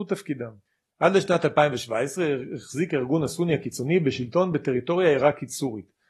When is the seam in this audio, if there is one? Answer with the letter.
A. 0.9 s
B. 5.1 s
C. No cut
A